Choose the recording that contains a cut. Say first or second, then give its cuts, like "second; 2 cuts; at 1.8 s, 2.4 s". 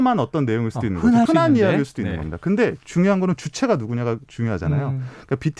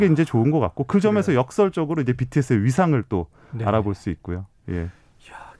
first; 1 cut; at 1.3 s